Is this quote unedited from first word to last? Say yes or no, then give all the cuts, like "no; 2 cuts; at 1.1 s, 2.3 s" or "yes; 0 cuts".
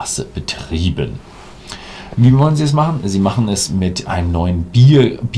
no; 1 cut; at 2.1 s